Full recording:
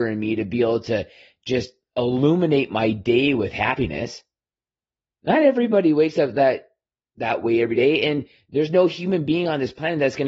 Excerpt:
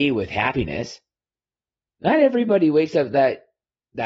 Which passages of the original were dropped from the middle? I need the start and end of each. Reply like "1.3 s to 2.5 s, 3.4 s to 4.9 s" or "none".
none